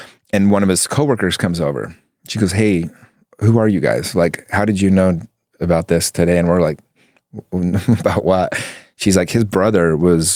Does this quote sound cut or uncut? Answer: uncut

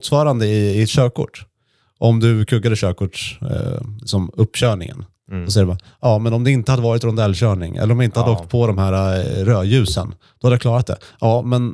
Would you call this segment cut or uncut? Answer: uncut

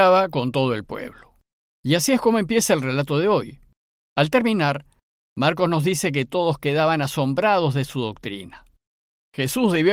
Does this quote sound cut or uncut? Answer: cut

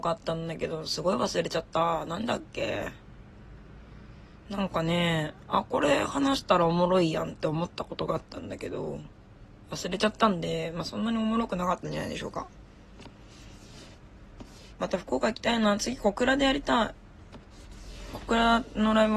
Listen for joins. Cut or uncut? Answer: cut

